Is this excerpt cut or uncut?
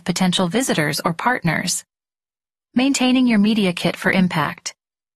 uncut